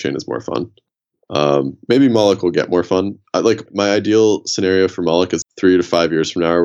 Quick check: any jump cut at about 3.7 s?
yes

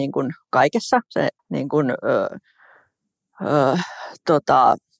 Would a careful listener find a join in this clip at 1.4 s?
yes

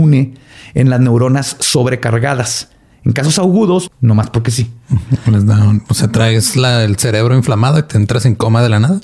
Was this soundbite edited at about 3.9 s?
yes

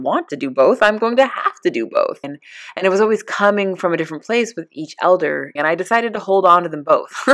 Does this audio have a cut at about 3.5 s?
no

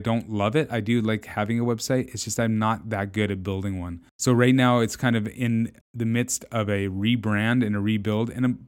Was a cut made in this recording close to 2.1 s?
no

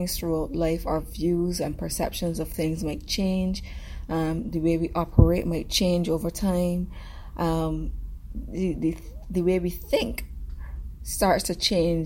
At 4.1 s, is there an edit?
no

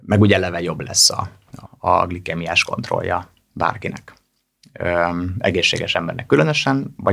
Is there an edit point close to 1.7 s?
yes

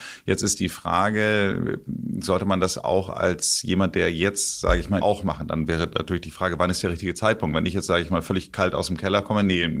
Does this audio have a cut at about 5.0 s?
yes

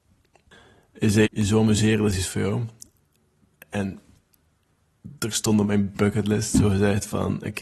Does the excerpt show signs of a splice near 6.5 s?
no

